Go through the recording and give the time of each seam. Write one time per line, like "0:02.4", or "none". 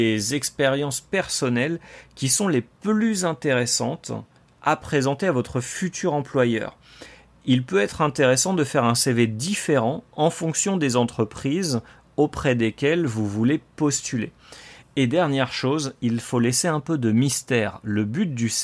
none